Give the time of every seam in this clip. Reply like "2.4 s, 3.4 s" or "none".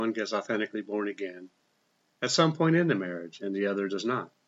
none